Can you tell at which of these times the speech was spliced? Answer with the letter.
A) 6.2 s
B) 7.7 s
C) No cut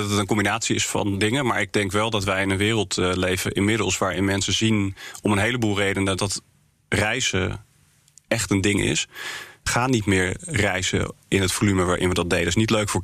A